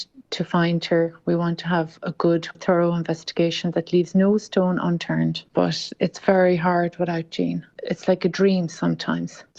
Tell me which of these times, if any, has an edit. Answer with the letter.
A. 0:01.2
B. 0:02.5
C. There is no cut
B